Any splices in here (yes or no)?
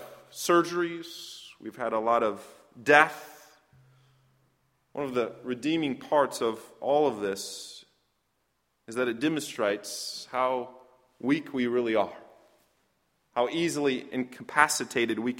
no